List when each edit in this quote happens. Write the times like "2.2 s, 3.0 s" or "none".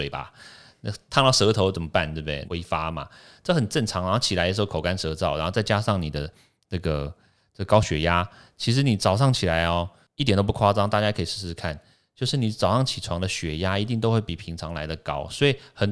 2.5 s

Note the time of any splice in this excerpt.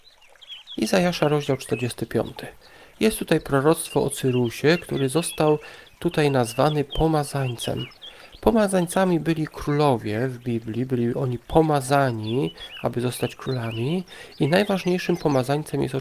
none

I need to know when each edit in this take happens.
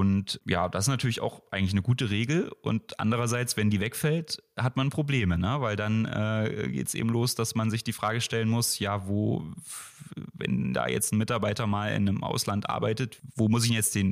none

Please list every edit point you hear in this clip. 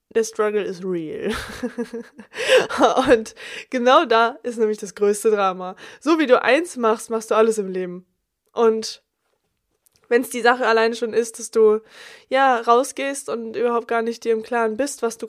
none

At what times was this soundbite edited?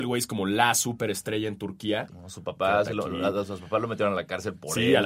2.1 s

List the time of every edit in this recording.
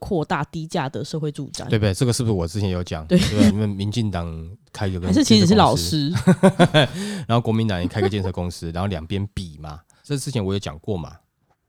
3.5 s, 10.0 s

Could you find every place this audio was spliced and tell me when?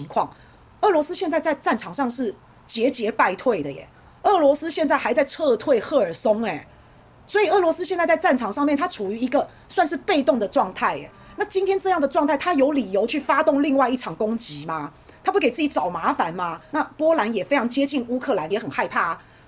16.7 s, 18.5 s

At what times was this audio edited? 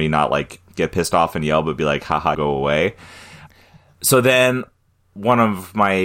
2.3 s

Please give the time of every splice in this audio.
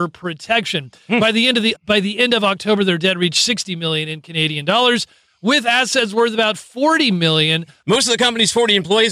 1.8 s, 7.8 s

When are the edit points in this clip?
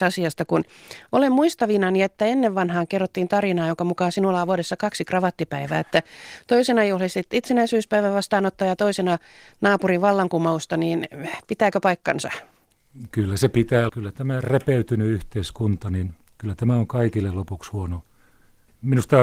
13.9 s

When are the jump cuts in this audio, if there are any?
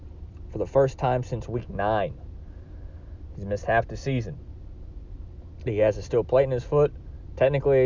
5.7 s

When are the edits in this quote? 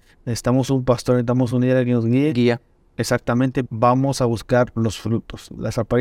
3.7 s

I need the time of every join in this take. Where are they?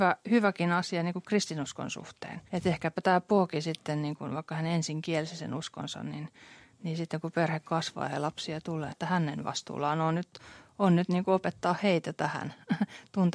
2.5 s, 8.9 s

